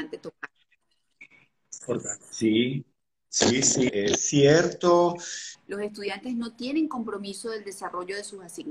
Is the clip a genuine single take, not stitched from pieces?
no; 2 cuts; at 3.9 s, 5.5 s

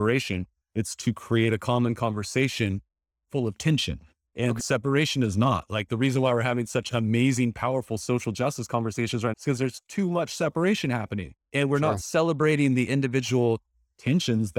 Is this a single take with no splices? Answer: no; 2 cuts; at 4.6 s, 9.3 s

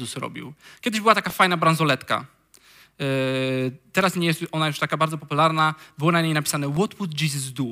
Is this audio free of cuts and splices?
yes; 0 cuts

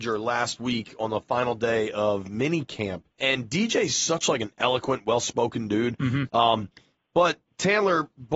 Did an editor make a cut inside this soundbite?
yes; 2 cuts; at 3.1 s, 6.3 s

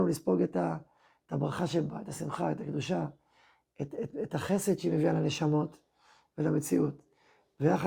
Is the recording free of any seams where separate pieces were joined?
yes; 0 cuts

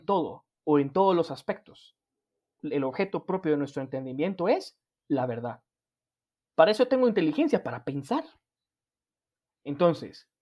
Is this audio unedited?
no; 1 cut; at 2.6 s

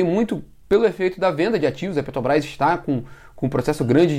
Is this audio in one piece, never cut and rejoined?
yes; 0 cuts

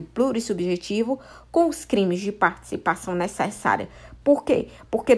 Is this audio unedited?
no; 1 cut; at 4.2 s

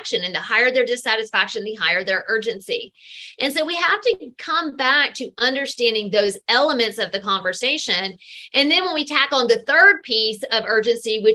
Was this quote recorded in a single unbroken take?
yes; 0 cuts

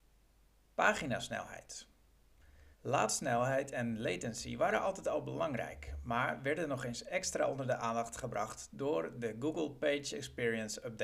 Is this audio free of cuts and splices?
no; 1 cut; at 2.7 s

